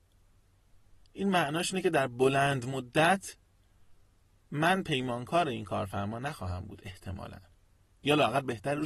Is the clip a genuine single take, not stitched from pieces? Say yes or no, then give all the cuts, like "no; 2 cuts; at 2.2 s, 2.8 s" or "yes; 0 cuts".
yes; 0 cuts